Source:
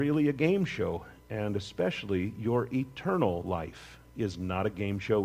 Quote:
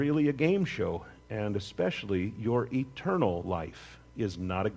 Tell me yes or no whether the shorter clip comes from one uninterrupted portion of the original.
yes